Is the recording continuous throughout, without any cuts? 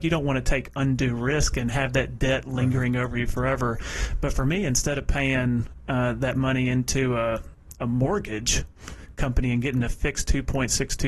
yes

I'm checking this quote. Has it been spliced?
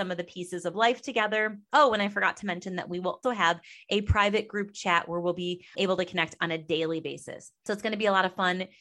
yes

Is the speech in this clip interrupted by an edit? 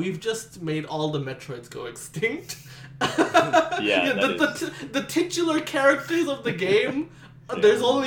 no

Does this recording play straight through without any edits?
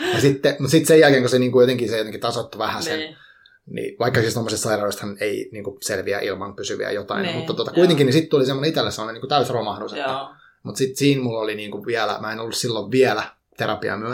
yes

